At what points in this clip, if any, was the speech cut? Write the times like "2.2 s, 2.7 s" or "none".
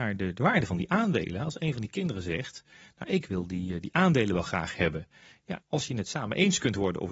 5.6 s